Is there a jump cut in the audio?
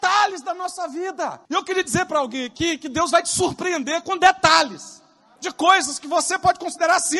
yes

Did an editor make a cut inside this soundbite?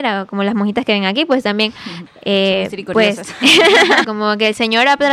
yes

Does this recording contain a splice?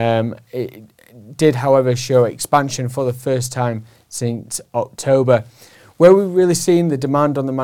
no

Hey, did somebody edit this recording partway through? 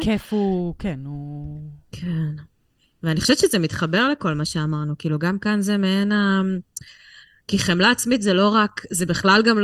no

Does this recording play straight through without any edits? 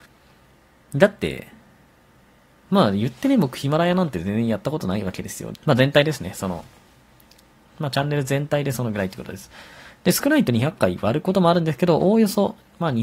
no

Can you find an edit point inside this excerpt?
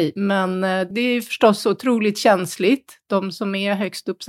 no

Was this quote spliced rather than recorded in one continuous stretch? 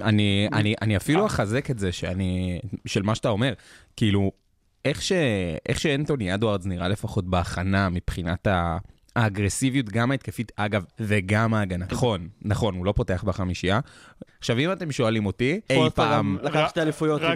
yes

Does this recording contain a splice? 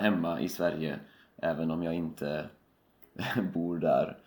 no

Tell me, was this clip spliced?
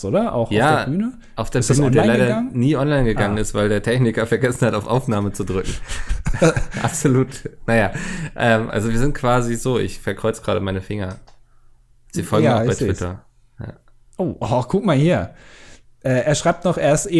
yes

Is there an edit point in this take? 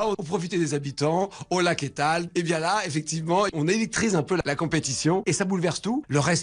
no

